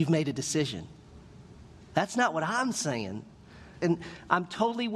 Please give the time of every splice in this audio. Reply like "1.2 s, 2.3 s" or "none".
3.8 s

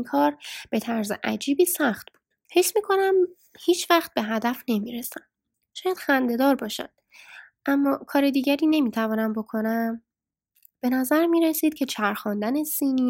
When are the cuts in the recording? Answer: 2.4 s

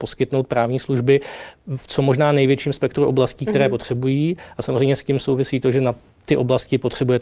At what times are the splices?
none

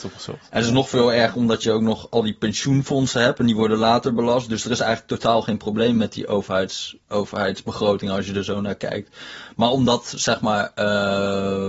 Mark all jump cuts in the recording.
7.0 s

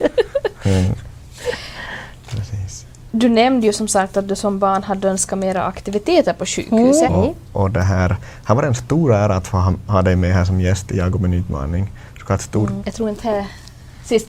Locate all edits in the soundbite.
7.1 s, 12.8 s

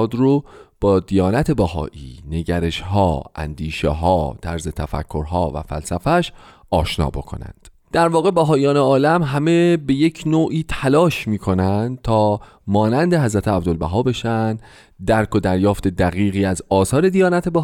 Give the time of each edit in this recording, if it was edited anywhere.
none

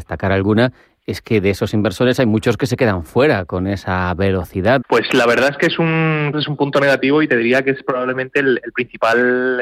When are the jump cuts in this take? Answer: 4.8 s, 6.3 s

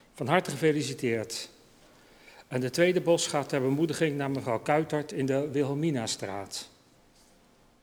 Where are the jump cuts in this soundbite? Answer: none

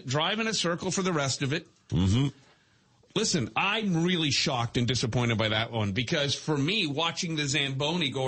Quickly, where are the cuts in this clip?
1.9 s

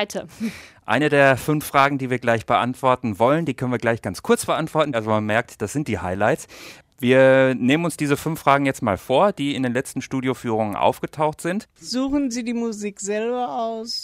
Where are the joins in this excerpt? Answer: 4.9 s

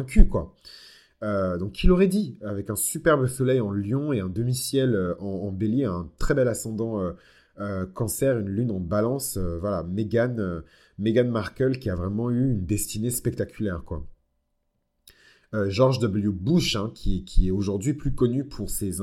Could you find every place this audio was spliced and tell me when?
none

